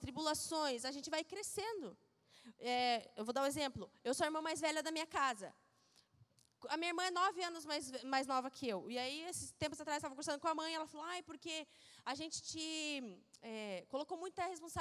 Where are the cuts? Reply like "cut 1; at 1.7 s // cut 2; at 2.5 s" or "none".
none